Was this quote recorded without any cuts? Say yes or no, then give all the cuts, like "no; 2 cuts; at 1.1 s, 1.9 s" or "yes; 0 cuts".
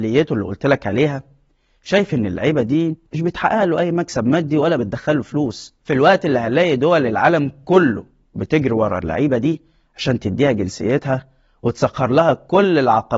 no; 1 cut; at 3.1 s